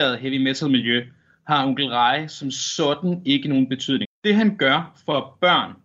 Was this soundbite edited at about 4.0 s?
yes; 1 cut; at 4.0 s

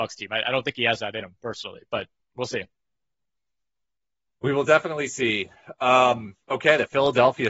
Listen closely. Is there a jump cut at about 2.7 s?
no; 1 cut; at 6.4 s

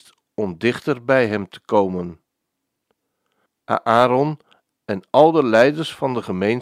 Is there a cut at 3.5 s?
yes; 1 cut; at 3.5 s

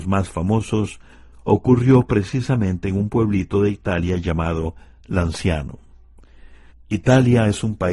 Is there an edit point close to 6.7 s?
yes; 1 cut; at 6.7 s

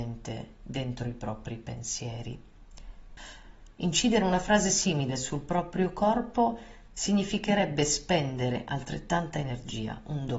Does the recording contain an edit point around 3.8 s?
yes; 1 cut; at 3.8 s

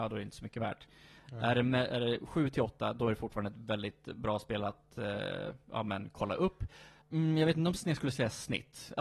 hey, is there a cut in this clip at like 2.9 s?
no; 2 cuts; at 1.2 s, 7.0 s

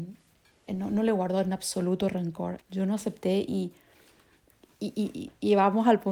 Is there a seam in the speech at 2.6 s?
yes; 1 cut; at 2.6 s

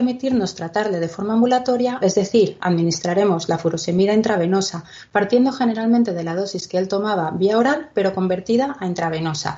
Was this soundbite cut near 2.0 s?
yes; 1 cut; at 2.0 s

